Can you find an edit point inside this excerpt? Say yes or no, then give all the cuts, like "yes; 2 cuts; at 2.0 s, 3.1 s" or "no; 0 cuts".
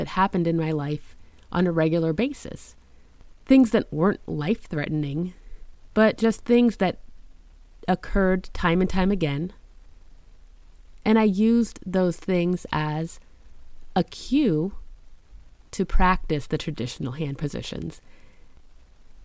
yes; 1 cut; at 5.9 s